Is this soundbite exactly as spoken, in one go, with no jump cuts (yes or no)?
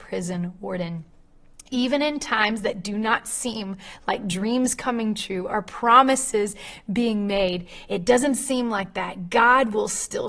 yes